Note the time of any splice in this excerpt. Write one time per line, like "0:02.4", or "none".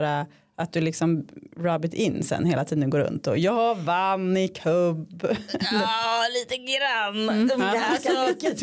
none